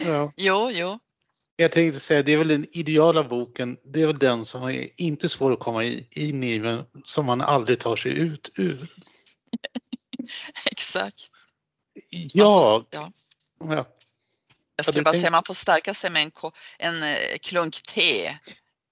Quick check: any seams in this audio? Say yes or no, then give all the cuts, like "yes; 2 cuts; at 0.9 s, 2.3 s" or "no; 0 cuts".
no; 0 cuts